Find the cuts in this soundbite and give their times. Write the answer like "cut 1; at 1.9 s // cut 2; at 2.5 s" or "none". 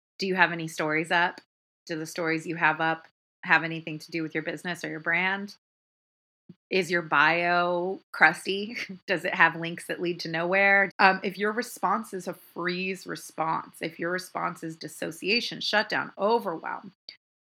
cut 1; at 10.9 s